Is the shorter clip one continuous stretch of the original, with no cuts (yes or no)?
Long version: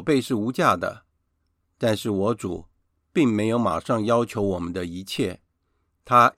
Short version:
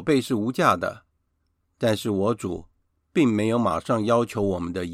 yes